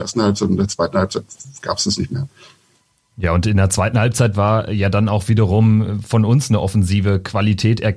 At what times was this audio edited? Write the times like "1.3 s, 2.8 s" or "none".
none